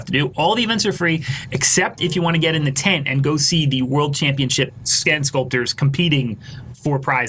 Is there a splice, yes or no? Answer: no